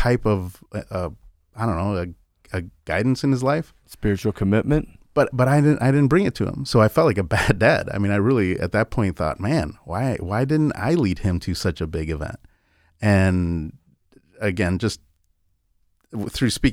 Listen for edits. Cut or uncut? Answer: uncut